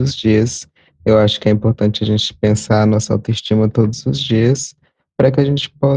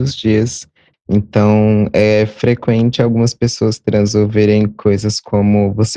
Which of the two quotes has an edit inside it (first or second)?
second